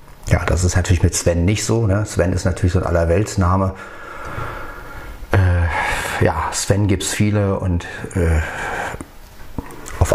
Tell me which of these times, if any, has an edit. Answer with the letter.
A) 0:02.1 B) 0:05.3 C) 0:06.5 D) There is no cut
D